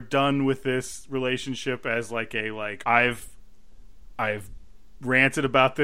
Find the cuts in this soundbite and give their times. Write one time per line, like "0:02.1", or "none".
0:02.8